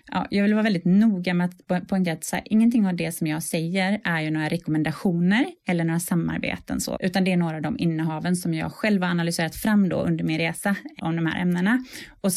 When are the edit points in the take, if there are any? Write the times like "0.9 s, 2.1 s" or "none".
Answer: 7.0 s, 11.0 s